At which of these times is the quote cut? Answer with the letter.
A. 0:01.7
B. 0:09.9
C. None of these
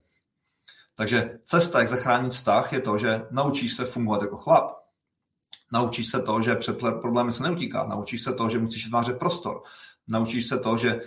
C